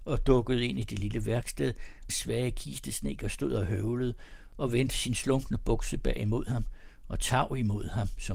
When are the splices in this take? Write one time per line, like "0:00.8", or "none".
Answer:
0:02.1